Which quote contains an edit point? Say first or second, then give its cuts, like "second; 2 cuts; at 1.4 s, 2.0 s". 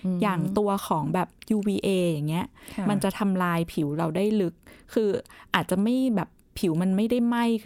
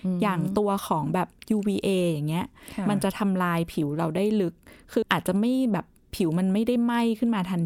second; 1 cut; at 5.0 s